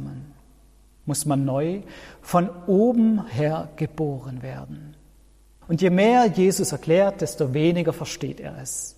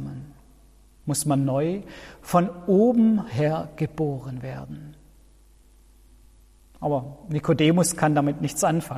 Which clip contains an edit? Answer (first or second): first